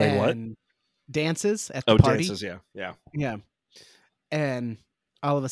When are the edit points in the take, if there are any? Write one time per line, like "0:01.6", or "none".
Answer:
none